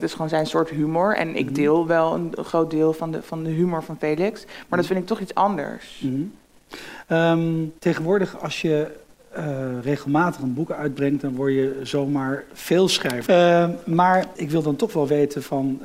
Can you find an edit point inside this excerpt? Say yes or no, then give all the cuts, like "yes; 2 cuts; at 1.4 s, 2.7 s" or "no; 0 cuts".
yes; 3 cuts; at 7.8 s, 13.3 s, 14.3 s